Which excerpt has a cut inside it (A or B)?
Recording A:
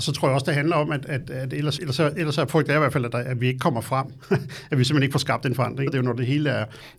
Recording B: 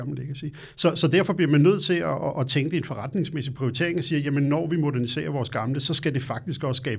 A